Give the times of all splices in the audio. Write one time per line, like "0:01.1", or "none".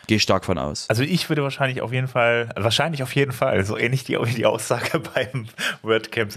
none